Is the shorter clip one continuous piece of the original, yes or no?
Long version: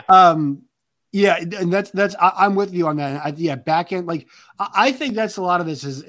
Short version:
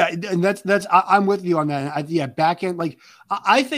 yes